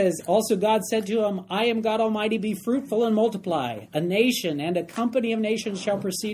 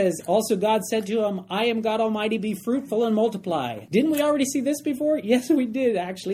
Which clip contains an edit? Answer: second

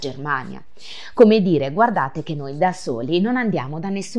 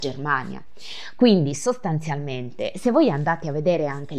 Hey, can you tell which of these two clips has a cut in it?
second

